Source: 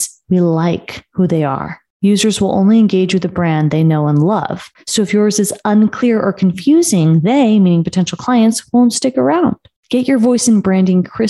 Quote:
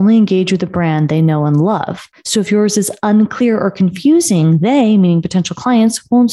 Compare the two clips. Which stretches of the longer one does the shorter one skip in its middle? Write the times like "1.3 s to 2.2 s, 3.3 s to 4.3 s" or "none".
none